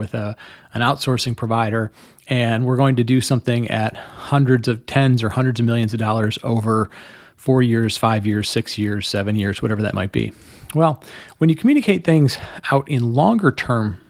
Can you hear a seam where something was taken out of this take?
no; 0 cuts

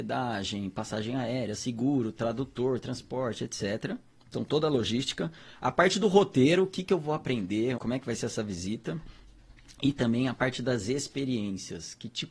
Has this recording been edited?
yes; 1 cut; at 7.8 s

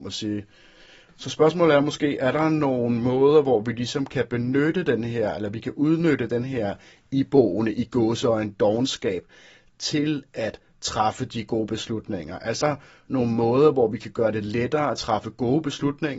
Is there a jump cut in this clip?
yes; 1 cut; at 12.6 s

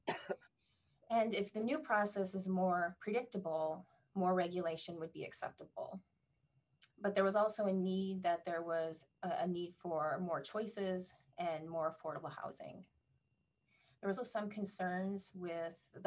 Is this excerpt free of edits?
no; 2 cuts; at 6.9 s, 14.2 s

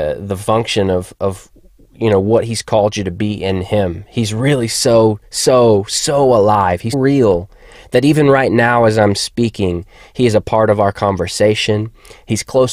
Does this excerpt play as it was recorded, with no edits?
no; 1 cut; at 6.9 s

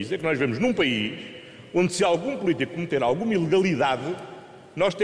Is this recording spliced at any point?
no; 0 cuts

